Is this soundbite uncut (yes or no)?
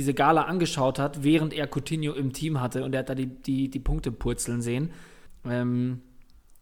no